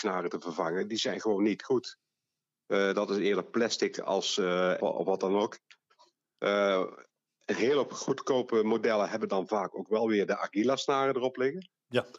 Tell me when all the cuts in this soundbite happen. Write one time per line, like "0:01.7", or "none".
0:04.8